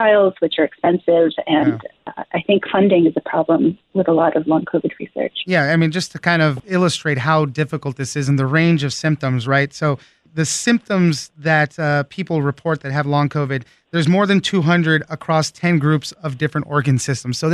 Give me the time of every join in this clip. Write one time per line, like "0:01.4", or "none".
none